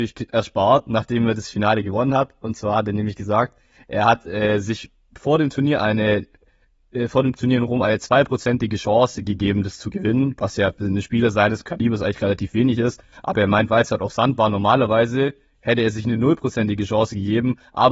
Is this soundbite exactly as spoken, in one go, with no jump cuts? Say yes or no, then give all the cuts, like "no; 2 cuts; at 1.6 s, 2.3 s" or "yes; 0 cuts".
yes; 0 cuts